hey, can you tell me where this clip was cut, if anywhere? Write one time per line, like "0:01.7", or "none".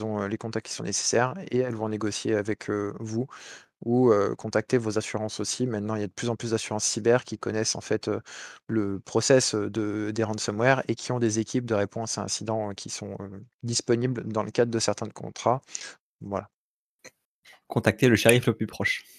0:16.0